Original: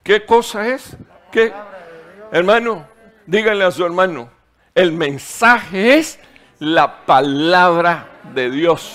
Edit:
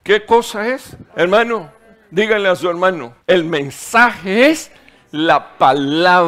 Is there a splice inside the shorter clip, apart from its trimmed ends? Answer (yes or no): yes